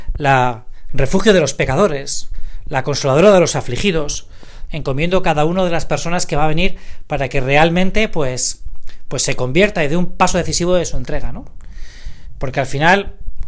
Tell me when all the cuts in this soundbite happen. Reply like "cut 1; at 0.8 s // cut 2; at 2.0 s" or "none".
cut 1; at 4.7 s